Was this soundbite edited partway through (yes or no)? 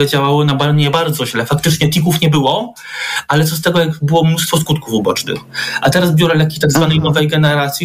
no